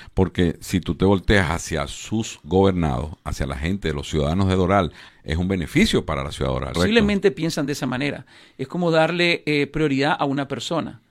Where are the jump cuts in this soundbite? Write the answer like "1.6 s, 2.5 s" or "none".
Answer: 5.1 s, 6.7 s